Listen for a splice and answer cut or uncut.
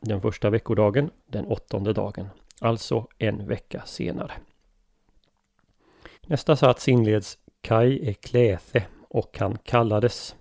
cut